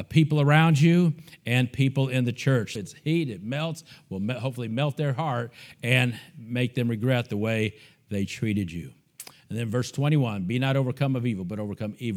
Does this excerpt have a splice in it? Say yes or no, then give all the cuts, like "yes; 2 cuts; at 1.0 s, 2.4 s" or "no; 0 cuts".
yes; 1 cut; at 2.8 s